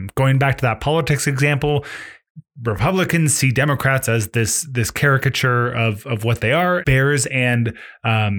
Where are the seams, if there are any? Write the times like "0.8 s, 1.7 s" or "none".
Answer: 6.8 s

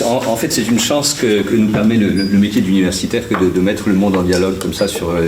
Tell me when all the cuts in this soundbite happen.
none

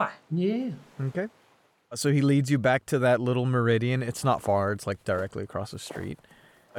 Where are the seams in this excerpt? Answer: none

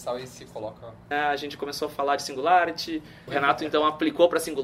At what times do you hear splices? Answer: 1.1 s, 3.3 s

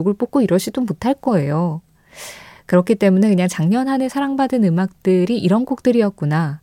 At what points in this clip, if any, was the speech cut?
none

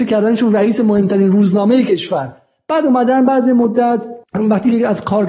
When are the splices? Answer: 4.2 s

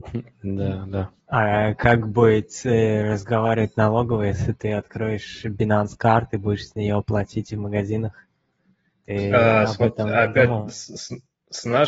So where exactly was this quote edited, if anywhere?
none

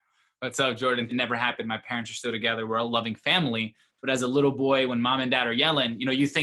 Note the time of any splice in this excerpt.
1.1 s

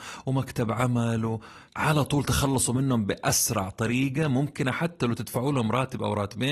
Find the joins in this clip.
1.7 s

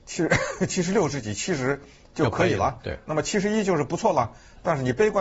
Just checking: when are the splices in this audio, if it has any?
none

